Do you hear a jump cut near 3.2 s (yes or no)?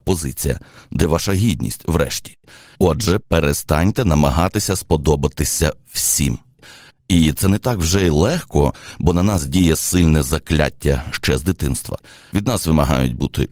yes